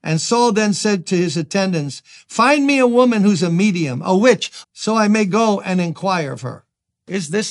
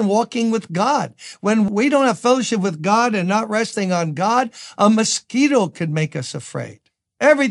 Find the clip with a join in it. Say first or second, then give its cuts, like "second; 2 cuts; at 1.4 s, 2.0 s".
first; 1 cut; at 4.6 s